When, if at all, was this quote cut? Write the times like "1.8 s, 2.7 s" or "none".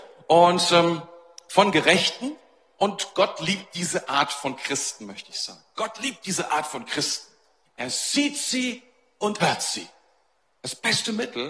7.6 s, 9.4 s